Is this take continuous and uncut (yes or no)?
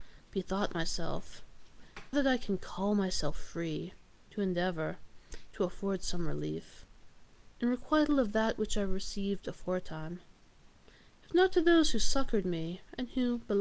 no